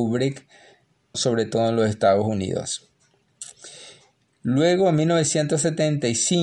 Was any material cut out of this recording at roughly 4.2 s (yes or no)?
no